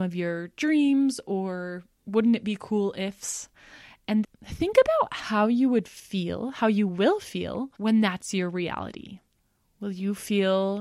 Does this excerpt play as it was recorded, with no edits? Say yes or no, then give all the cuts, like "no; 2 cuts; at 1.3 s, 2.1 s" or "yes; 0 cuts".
no; 2 cuts; at 4.2 s, 7.7 s